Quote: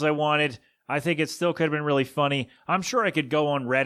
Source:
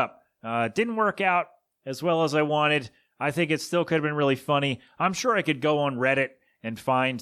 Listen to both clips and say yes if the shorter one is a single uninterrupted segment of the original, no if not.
yes